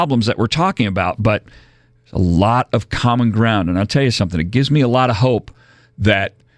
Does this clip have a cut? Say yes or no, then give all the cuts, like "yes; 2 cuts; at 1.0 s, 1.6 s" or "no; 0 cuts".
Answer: no; 0 cuts